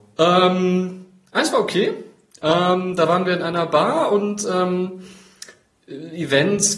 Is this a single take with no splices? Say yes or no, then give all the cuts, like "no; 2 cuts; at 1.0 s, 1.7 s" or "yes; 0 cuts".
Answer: yes; 0 cuts